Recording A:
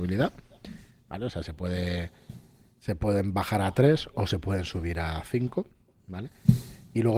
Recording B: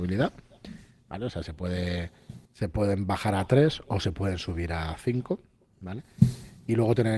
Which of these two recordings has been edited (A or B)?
B